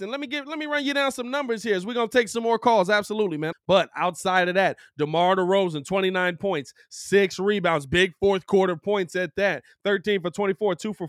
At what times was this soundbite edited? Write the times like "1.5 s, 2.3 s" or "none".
3.5 s